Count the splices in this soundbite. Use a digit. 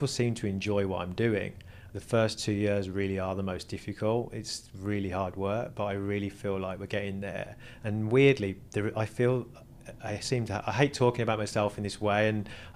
1